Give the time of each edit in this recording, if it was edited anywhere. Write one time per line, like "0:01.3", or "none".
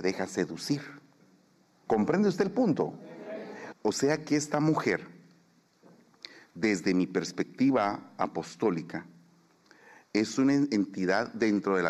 0:01.9
0:03.7